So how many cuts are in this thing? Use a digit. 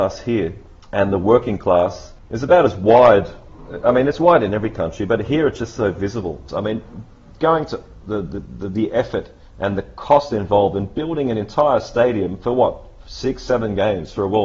1